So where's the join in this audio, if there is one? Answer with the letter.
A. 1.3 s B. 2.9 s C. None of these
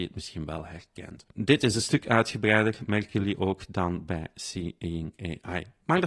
A